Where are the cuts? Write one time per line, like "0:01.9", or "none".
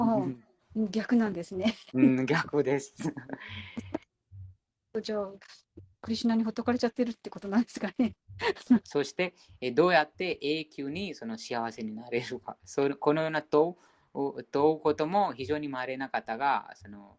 0:08.8